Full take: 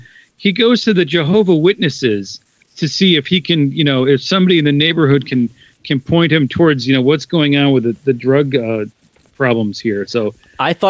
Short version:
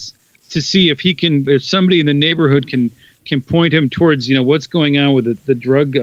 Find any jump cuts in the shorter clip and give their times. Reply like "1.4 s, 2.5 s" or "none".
1.5 s